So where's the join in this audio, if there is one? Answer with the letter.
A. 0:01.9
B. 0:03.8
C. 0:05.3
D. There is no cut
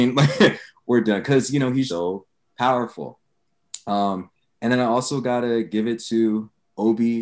A